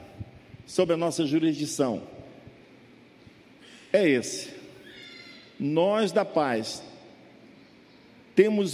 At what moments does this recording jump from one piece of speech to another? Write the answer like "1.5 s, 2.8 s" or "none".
none